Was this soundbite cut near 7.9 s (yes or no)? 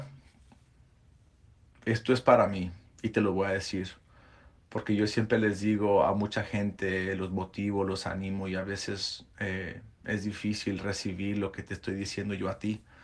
no